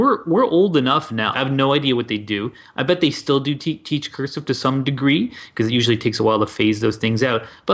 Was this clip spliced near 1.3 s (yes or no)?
yes